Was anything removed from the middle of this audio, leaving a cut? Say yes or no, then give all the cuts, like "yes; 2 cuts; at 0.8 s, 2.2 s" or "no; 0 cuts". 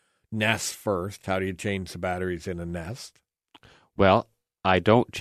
no; 0 cuts